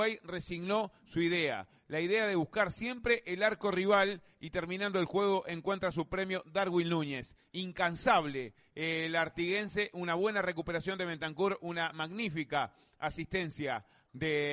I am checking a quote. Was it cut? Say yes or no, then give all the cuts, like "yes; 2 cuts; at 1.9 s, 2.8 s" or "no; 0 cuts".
no; 0 cuts